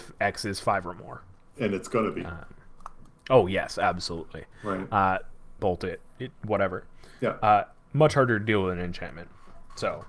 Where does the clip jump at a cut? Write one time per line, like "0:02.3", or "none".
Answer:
0:05.6